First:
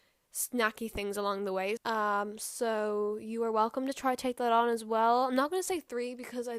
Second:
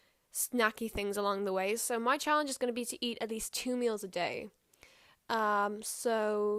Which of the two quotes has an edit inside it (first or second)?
first